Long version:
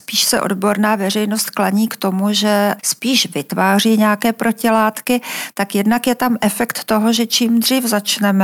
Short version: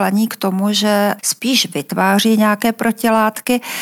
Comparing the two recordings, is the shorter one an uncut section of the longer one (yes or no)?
yes